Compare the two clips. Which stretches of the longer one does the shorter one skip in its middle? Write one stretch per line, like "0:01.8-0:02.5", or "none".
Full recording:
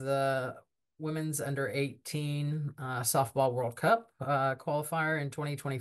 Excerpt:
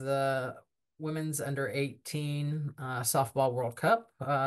none